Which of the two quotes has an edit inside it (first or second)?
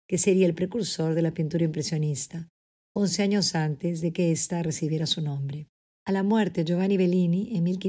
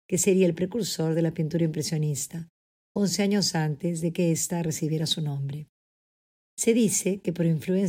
first